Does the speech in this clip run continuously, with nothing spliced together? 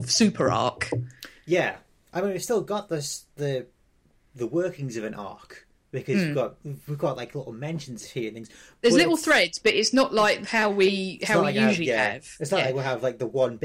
yes; 0 cuts

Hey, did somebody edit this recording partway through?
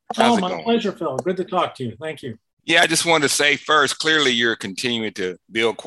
no; 0 cuts

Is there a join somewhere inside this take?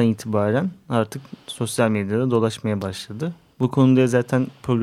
no; 0 cuts

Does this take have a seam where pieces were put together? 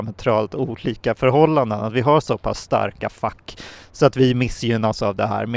no; 0 cuts

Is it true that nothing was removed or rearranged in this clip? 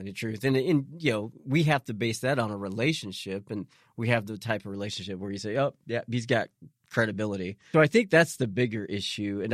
no; 1 cut; at 7.7 s

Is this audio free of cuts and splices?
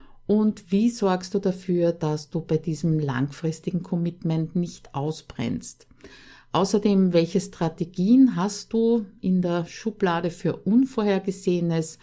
yes; 0 cuts

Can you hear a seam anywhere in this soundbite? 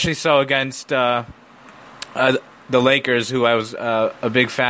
no; 0 cuts

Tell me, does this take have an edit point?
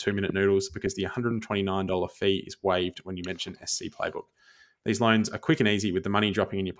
no; 0 cuts

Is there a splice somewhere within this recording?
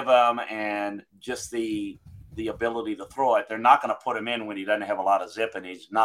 yes; 1 cut; at 1.1 s

